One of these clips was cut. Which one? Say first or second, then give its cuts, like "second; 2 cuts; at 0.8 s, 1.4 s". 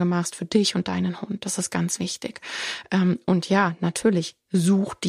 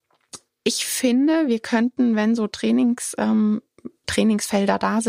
second; 1 cut; at 4.0 s